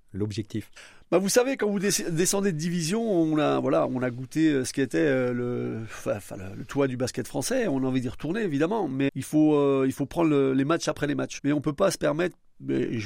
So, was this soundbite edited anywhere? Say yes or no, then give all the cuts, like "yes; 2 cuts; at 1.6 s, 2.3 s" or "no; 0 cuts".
yes; 2 cuts; at 9.1 s, 11.4 s